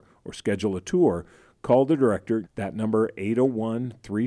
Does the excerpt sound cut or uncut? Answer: cut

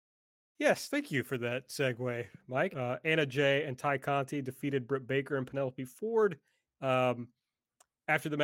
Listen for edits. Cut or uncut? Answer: cut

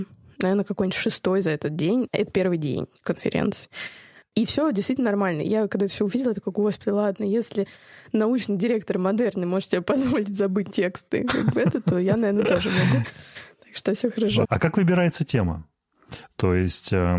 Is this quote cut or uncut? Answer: cut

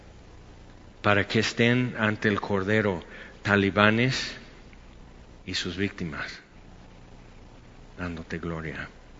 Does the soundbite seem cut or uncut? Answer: cut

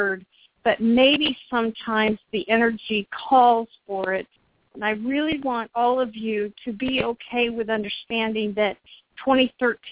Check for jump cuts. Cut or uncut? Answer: cut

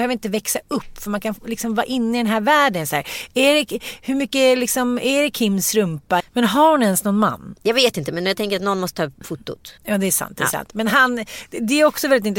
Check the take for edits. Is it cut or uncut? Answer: cut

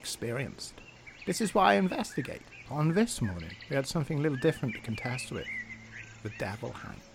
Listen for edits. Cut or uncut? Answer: cut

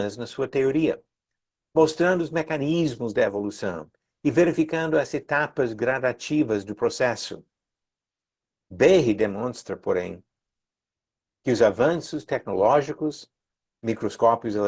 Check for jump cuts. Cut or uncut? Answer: uncut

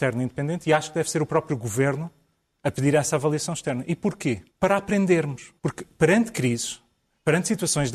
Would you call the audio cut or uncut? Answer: cut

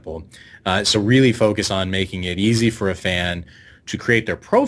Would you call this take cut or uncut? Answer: uncut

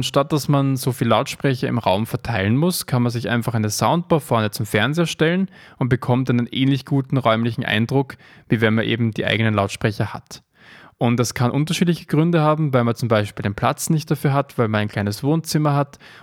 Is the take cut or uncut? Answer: uncut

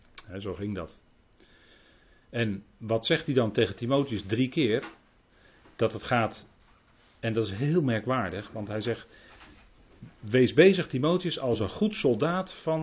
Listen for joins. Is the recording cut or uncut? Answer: uncut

